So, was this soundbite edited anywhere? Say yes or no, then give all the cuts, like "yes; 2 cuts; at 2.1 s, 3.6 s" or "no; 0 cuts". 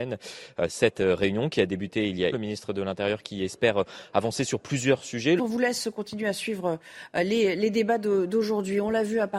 yes; 2 cuts; at 2.3 s, 5.4 s